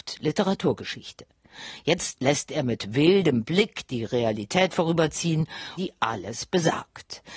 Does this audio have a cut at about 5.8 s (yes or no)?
yes